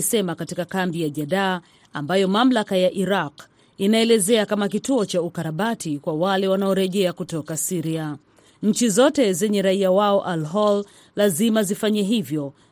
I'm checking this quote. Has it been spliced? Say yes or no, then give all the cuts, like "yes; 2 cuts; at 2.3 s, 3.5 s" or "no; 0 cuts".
yes; 1 cut; at 8.5 s